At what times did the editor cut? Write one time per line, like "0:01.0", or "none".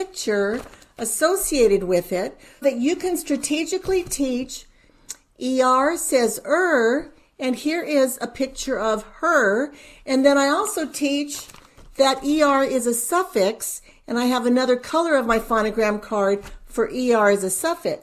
0:02.6

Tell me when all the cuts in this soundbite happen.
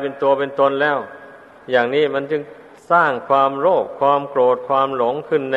none

